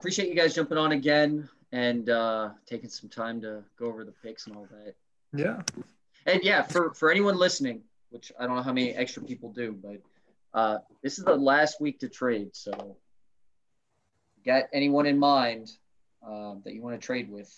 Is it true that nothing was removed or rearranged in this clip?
yes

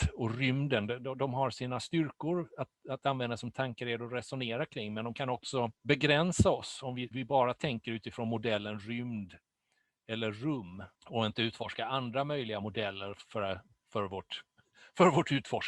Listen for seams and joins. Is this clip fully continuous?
no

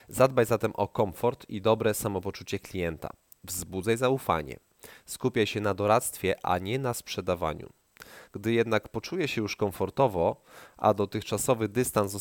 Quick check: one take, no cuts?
no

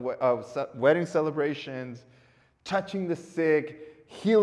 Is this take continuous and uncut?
yes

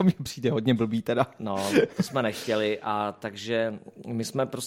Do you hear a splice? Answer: no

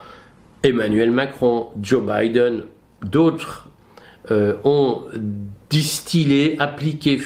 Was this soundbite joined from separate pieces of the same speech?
no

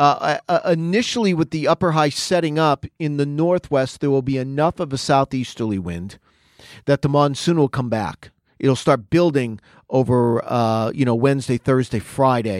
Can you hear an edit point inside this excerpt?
no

